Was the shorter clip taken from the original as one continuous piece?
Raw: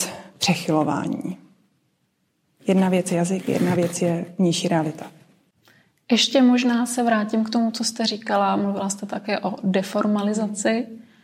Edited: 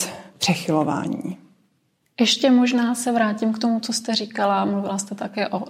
no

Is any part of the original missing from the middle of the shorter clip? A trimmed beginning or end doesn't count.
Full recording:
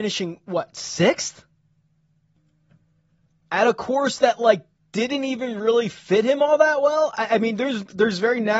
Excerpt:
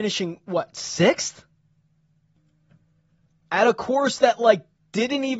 no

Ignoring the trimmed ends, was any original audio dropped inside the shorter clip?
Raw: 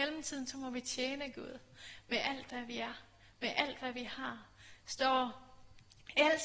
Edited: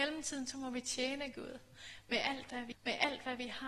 yes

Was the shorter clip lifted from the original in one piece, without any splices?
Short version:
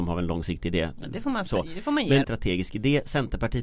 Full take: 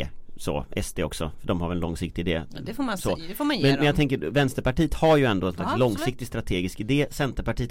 no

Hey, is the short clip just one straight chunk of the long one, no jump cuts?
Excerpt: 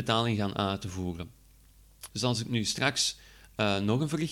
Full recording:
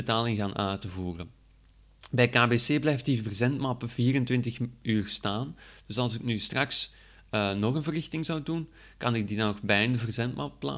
no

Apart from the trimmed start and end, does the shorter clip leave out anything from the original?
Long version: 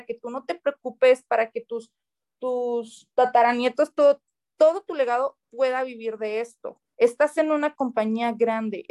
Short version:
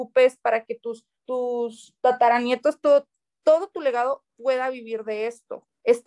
yes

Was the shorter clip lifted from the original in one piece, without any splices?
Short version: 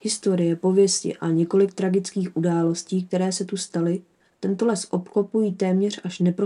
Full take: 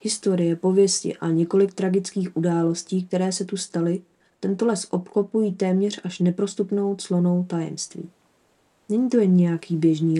yes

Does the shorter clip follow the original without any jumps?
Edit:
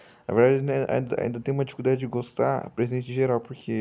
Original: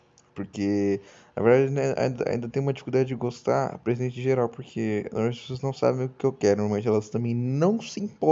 yes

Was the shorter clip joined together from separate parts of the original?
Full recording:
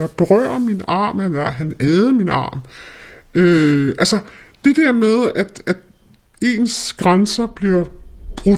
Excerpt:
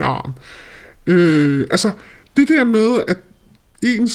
yes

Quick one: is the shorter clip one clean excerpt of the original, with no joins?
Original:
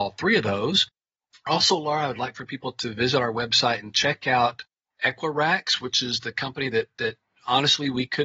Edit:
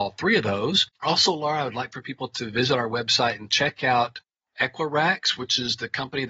no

